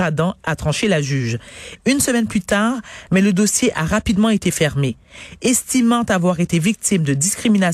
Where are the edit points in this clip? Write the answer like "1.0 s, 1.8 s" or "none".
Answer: 1.8 s, 3.1 s